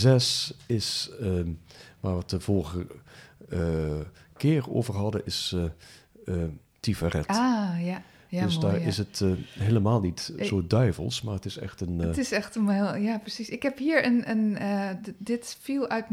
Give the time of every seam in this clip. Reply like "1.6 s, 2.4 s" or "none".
6.7 s